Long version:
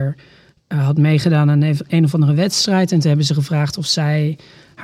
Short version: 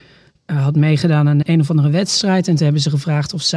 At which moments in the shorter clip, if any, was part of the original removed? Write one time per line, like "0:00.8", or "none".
0:01.4